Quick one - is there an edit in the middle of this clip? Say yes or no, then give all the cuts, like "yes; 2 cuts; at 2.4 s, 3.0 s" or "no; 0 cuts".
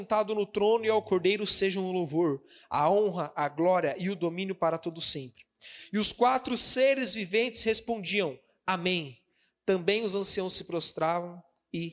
no; 0 cuts